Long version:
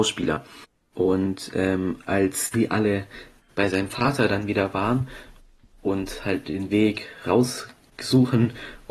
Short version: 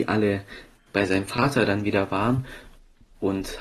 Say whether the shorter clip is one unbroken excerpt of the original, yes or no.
yes